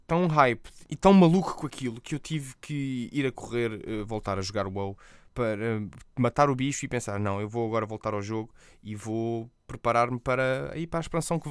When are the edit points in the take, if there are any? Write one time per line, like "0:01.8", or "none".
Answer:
none